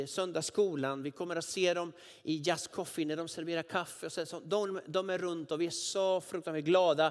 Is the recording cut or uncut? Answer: uncut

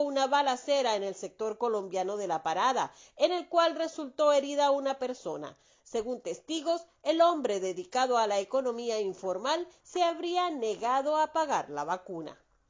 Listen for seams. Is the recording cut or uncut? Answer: uncut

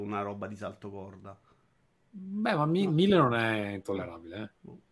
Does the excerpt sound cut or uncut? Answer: cut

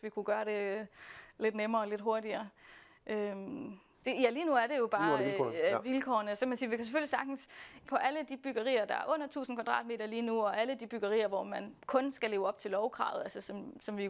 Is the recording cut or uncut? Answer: cut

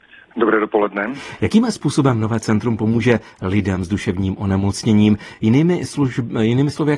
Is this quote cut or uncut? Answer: uncut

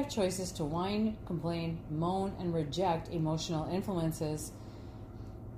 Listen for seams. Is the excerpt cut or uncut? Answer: uncut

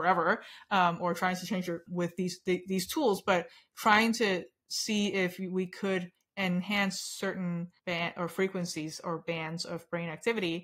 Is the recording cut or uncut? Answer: cut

